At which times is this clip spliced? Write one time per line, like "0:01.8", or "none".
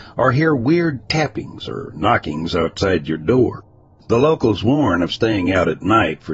none